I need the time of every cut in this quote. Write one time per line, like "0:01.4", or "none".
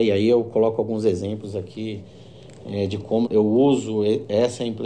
0:03.2